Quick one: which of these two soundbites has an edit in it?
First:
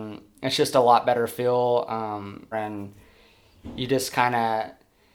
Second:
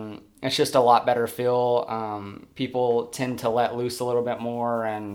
first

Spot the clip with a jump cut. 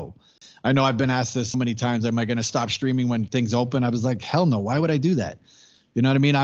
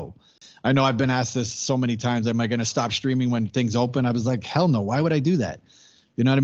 first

